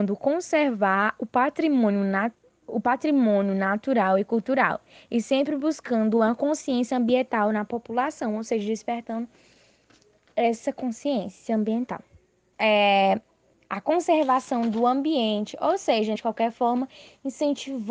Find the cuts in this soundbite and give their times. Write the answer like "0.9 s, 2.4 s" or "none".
2.6 s, 12.5 s, 16.2 s

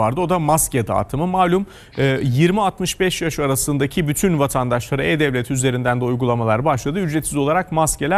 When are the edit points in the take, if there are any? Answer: none

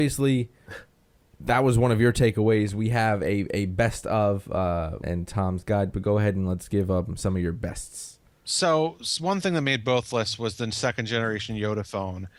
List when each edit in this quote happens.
5.0 s

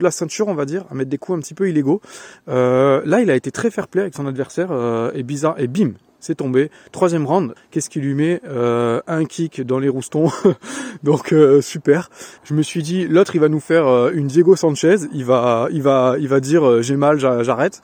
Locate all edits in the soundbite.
7.6 s

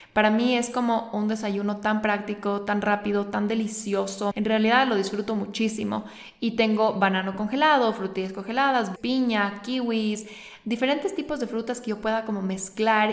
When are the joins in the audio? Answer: 4.3 s, 9.0 s

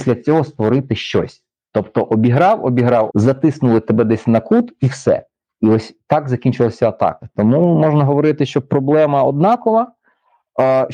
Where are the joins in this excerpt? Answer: 3.1 s

